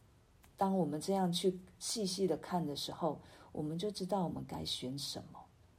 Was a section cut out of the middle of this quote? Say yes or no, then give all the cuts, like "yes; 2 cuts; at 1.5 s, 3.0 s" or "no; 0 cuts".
no; 0 cuts